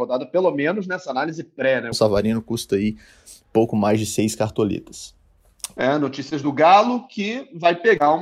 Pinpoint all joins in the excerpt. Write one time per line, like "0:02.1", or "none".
0:01.9
0:05.8